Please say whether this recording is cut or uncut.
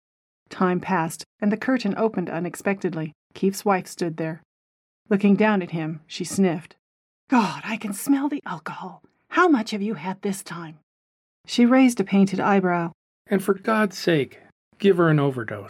cut